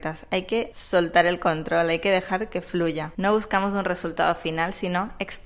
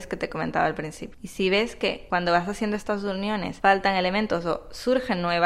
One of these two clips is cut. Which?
first; 1 cut; at 3.1 s

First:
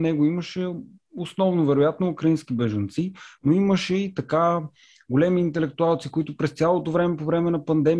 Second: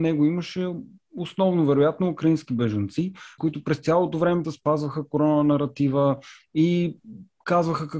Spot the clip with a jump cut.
second; 2 cuts; at 3.4 s, 4.4 s

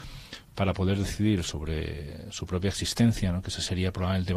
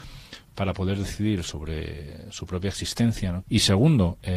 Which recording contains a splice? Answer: second; 1 cut; at 3.4 s

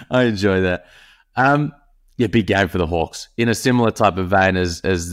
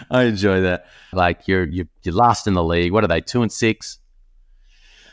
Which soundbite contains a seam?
second; 1 cut; at 1.1 s

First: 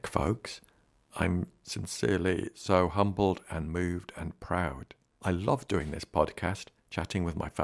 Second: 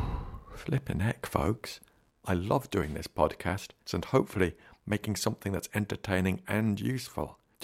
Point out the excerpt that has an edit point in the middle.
second; 2 cuts; at 2.1 s, 3.9 s

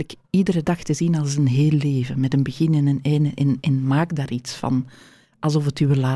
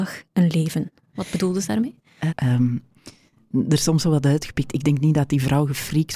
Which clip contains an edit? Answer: second; 1 cut; at 2.3 s

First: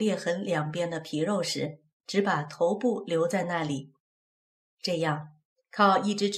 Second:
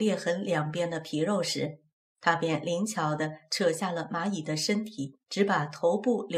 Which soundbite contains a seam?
first; 1 cut; at 2.0 s

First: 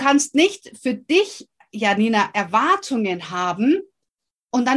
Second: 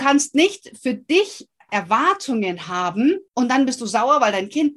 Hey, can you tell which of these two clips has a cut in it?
second; 2 cuts; at 1.7 s, 3.3 s

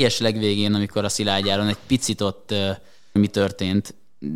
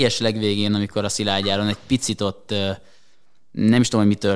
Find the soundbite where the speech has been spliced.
first; 1 cut; at 3.2 s

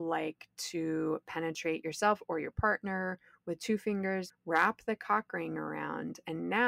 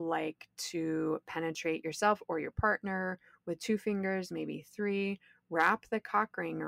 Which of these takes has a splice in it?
first; 1 cut; at 4.3 s

